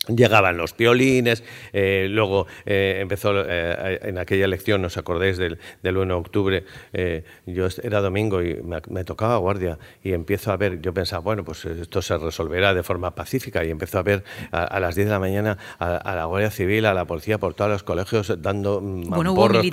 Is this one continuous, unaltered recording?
yes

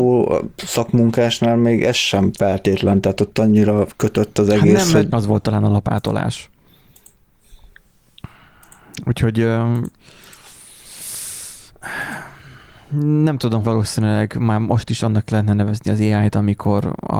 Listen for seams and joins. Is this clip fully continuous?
no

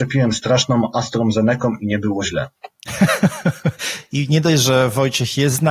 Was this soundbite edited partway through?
no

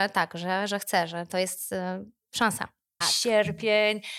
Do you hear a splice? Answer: yes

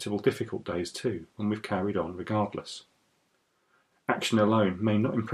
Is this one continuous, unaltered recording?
no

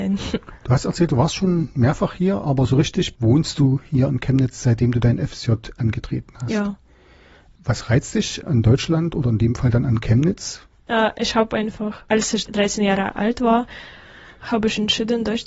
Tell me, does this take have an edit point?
no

